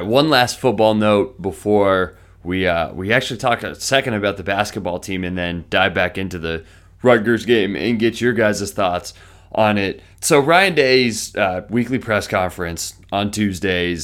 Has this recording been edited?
yes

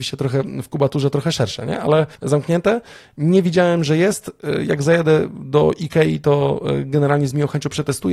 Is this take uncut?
no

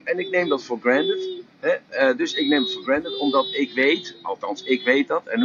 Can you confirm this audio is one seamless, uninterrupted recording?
yes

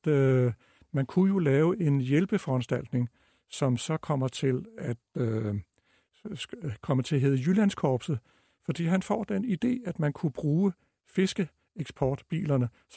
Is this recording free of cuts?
yes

